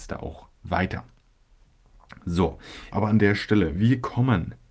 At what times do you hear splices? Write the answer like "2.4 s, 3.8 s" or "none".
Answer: 2.9 s